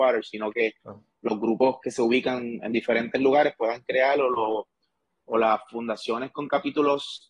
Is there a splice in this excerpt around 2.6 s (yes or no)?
yes